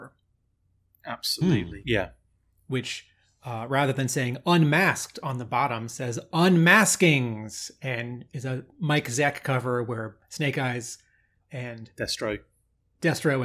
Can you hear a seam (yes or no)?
yes